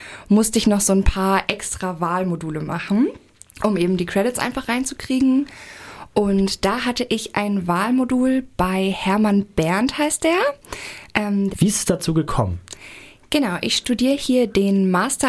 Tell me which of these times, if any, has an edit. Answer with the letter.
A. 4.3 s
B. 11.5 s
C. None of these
B